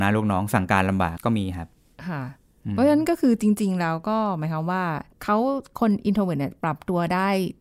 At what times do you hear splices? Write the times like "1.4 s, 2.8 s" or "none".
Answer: 1.2 s, 5.1 s